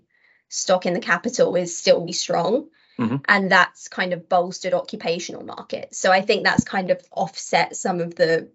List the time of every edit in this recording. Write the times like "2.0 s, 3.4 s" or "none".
2.1 s